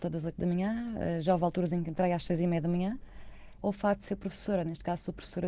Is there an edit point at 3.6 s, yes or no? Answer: yes